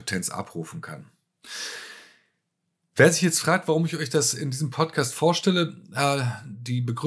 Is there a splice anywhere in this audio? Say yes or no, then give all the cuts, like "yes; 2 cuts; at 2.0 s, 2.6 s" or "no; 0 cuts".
no; 0 cuts